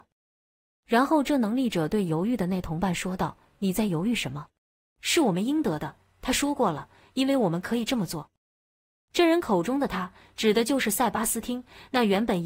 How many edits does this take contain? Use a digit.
0